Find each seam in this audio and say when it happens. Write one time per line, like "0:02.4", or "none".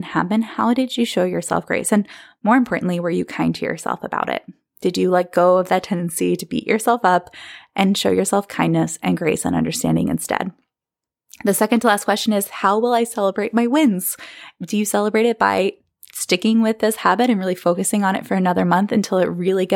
none